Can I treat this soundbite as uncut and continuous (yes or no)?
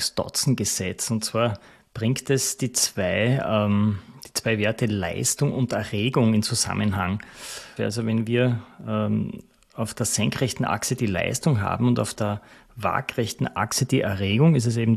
no